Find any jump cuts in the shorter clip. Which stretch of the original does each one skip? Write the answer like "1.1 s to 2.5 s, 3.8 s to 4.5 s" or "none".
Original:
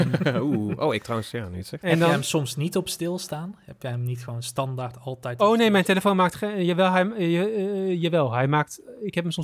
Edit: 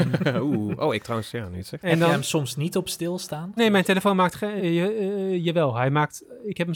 3.6 s to 5.6 s, 6.6 s to 7.1 s